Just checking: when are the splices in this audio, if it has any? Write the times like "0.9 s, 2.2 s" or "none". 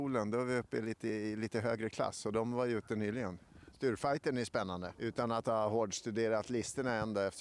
3.7 s, 4.9 s